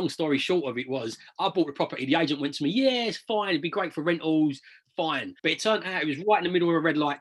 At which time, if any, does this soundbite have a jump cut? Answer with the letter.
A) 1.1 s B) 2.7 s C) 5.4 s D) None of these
C